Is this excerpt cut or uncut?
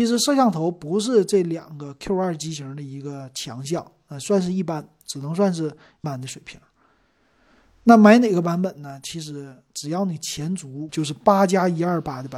cut